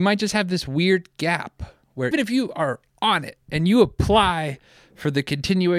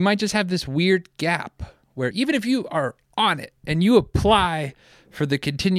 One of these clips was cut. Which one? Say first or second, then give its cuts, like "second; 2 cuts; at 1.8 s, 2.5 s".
first; 1 cut; at 2.1 s